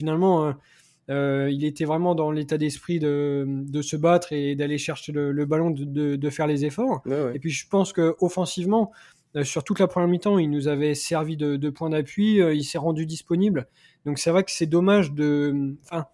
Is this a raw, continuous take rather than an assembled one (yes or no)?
yes